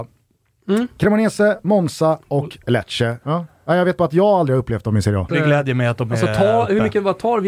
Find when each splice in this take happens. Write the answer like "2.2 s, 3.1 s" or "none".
3.2 s, 5.3 s